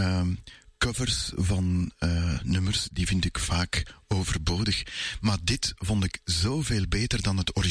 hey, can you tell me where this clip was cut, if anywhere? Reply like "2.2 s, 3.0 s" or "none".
none